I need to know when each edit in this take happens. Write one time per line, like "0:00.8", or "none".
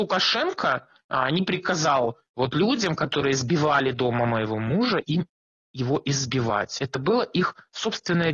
none